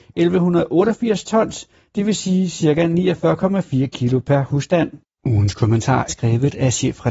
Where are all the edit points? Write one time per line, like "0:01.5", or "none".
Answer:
0:06.1